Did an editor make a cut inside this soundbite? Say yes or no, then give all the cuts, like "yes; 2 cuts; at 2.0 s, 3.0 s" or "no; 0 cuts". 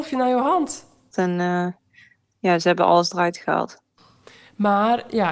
yes; 1 cut; at 1.1 s